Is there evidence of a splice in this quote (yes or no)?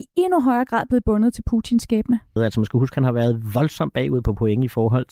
yes